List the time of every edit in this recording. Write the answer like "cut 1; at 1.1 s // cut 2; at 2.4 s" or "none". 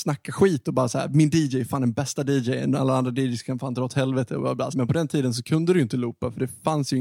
cut 1; at 4.7 s